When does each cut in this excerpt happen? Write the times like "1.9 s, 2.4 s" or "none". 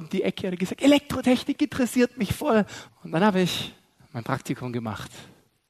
2.9 s